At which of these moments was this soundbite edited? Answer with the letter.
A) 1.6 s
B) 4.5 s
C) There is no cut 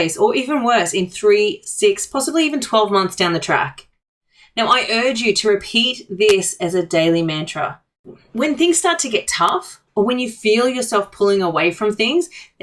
C